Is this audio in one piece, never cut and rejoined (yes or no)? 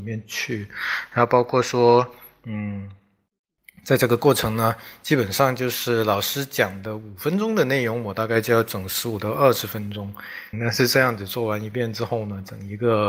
no